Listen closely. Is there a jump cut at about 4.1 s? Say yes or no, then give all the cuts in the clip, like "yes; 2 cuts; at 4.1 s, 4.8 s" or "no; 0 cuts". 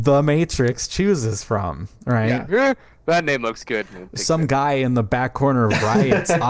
no; 1 cut; at 2.5 s